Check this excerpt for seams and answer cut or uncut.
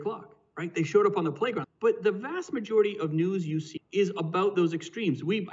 cut